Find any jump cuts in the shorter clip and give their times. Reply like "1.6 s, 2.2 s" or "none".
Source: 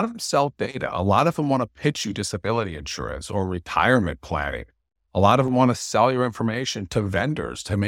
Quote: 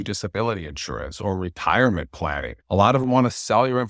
2.6 s